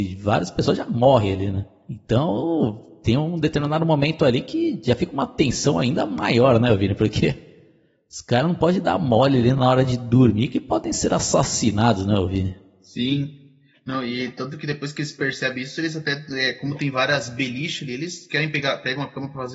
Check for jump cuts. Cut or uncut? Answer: uncut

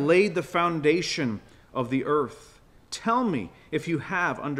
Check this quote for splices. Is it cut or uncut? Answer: uncut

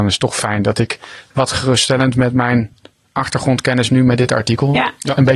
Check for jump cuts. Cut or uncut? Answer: uncut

